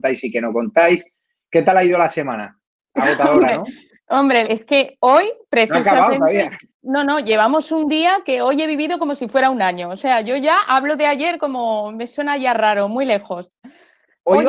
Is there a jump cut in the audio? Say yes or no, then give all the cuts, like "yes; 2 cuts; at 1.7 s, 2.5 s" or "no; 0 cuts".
yes; 1 cut; at 4.4 s